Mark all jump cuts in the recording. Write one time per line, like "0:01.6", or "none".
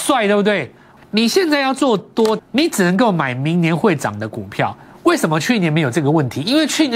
0:01.0
0:02.4